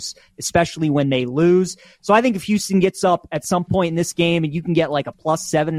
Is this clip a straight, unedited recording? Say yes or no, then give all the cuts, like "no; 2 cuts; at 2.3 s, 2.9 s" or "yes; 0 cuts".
yes; 0 cuts